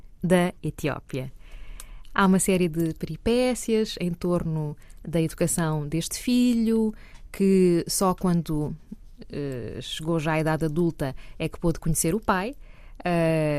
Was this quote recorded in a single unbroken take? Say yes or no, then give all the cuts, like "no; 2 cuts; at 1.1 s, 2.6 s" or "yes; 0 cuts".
yes; 0 cuts